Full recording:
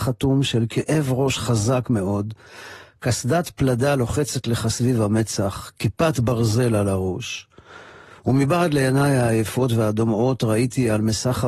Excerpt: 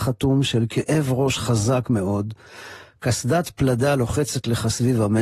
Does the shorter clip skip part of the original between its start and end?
no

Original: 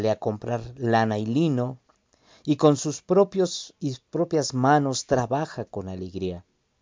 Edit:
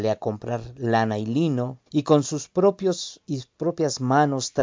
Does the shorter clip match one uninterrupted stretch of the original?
no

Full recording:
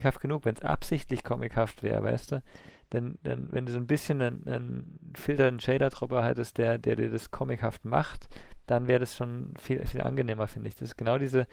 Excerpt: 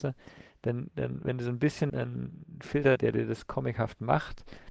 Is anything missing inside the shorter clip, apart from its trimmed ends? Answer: yes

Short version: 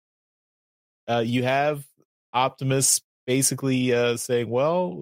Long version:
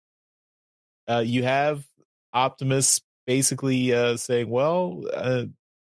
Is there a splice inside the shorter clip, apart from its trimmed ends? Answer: no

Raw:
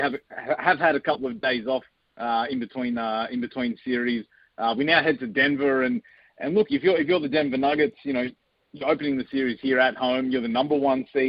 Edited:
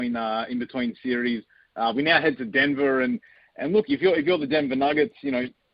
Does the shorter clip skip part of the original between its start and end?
no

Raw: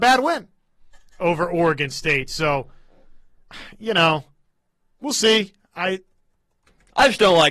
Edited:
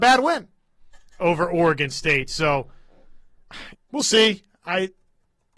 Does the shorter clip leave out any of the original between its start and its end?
yes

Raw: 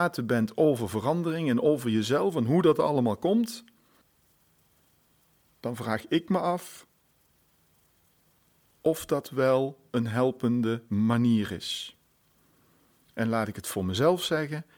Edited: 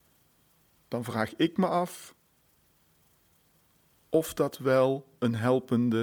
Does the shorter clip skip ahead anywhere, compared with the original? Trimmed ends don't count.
no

